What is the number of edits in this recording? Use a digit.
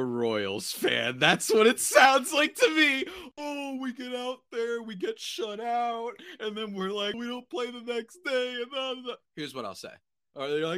2